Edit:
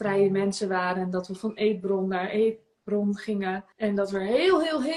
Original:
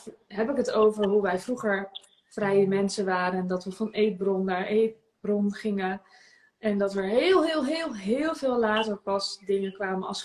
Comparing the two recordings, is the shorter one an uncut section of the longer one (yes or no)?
no